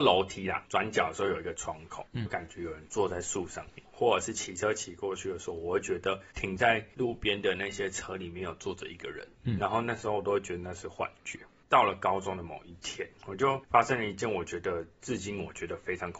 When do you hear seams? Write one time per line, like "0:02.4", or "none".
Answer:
0:02.3
0:03.8

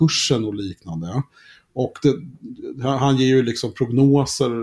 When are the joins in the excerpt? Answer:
none

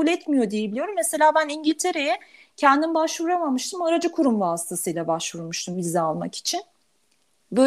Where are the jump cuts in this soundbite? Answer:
none

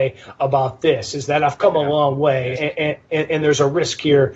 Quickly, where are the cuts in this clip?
0:02.5

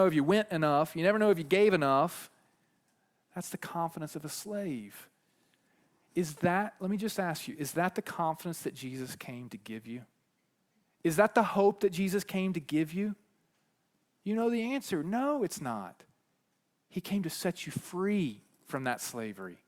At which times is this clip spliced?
none

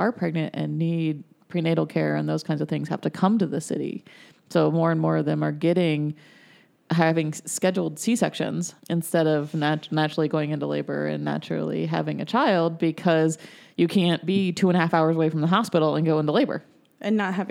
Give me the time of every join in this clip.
0:08.8

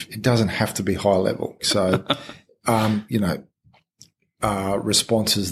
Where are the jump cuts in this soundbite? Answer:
0:01.6
0:03.1

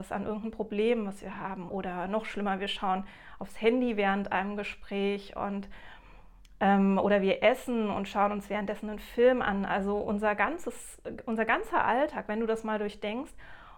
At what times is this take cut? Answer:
0:01.7

